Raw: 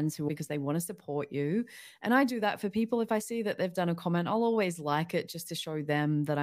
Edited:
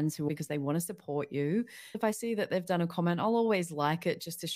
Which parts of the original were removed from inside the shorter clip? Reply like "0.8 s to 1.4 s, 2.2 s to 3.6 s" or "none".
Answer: 1.9 s to 3.0 s